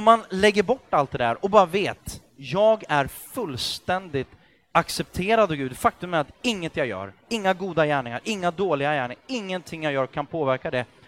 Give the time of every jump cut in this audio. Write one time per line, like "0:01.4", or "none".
none